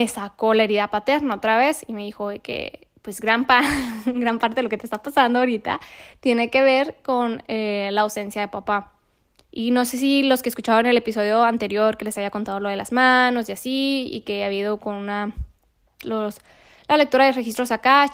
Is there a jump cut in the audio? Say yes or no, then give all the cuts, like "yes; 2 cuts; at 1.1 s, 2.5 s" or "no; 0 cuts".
yes; 2 cuts; at 9.4 s, 16.0 s